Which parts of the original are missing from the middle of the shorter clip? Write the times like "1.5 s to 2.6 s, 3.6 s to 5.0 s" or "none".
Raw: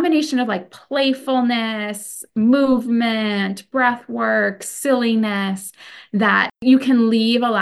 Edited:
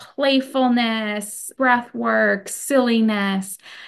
2.3 s to 3.7 s